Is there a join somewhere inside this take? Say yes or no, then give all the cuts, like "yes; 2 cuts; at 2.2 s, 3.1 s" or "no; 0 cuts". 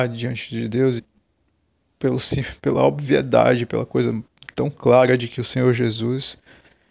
yes; 2 cuts; at 1.0 s, 4.5 s